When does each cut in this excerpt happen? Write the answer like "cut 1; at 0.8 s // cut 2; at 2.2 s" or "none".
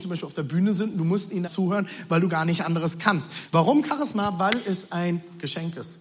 cut 1; at 1.5 s // cut 2; at 3.5 s